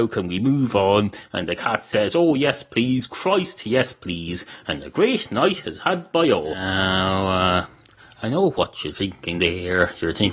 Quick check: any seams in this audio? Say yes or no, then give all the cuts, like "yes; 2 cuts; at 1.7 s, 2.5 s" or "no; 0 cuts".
no; 0 cuts